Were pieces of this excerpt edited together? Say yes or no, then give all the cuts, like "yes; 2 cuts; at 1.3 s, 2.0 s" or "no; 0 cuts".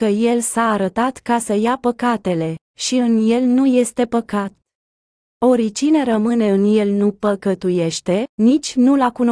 yes; 1 cut; at 8.3 s